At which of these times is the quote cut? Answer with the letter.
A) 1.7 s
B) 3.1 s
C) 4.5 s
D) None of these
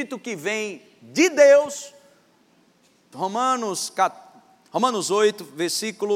B